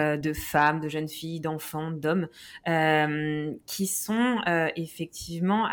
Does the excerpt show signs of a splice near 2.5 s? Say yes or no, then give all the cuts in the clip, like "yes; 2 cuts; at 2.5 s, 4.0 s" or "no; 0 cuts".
no; 0 cuts